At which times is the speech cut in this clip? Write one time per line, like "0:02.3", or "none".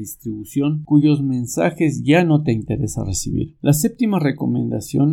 none